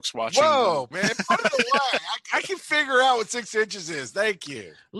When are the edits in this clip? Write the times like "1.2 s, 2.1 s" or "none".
0.9 s